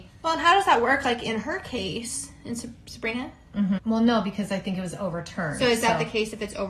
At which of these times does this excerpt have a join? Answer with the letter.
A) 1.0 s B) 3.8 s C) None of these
B